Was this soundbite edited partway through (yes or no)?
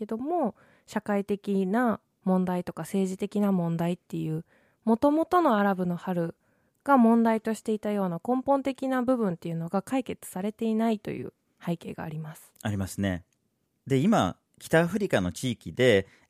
no